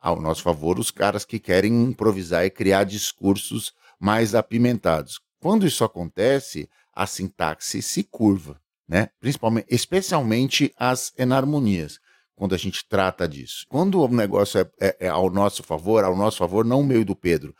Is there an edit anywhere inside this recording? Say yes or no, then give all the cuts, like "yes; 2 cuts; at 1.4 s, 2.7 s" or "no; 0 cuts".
yes; 1 cut; at 13.7 s